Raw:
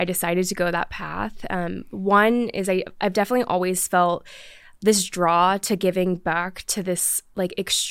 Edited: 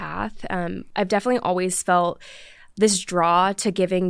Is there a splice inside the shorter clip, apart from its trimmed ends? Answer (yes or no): yes